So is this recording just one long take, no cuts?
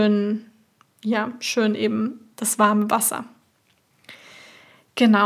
yes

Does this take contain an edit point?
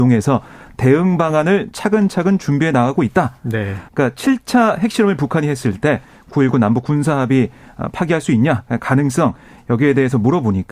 yes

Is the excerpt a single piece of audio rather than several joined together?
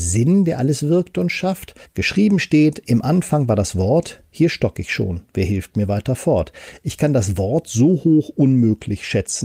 no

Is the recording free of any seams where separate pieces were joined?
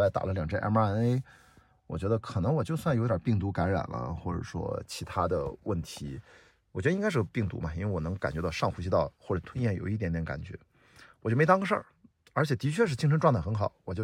yes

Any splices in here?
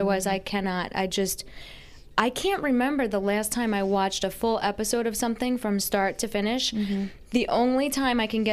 yes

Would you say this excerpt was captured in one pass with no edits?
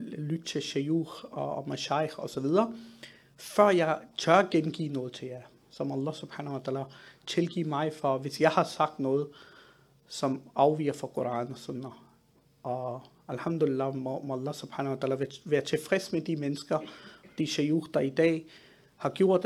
yes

